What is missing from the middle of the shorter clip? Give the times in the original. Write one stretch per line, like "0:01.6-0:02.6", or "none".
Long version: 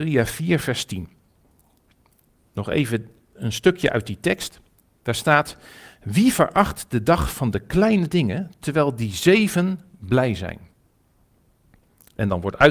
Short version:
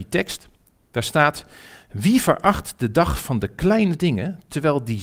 none

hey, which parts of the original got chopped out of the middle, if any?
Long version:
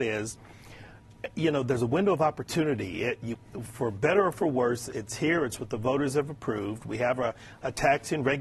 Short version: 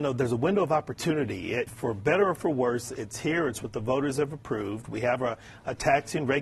0:03.2-0:03.6

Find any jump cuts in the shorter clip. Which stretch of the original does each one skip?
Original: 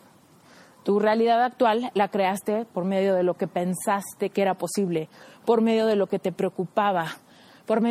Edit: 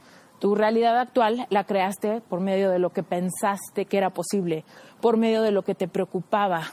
none

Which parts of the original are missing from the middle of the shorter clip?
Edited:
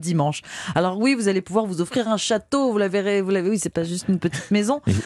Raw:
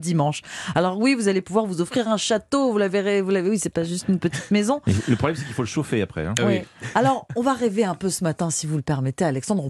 none

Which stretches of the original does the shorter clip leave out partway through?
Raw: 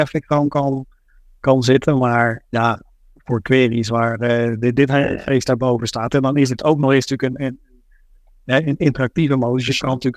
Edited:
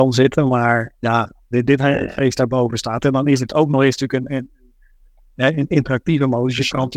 0:03.0-0:04.6

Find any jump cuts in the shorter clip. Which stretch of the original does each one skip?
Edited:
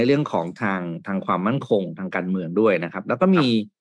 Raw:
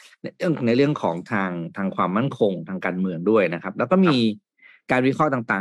none

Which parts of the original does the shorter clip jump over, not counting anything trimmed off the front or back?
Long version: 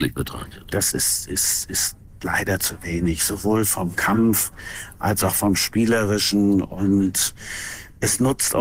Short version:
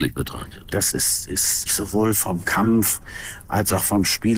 0:01.7-0:03.2

